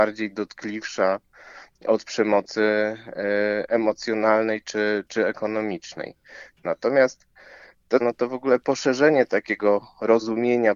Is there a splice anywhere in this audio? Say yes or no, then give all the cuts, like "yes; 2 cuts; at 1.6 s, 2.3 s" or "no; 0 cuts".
yes; 2 cuts; at 6.6 s, 8.0 s